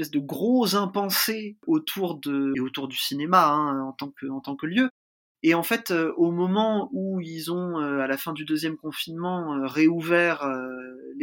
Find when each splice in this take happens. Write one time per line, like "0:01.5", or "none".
0:02.5